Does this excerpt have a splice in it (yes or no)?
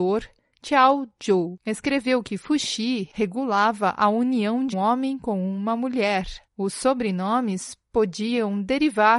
yes